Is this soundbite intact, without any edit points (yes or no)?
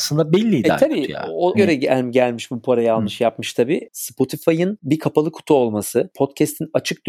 no